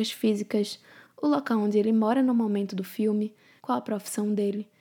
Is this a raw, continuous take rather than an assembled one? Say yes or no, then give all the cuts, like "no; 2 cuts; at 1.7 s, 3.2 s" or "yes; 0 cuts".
no; 1 cut; at 1.1 s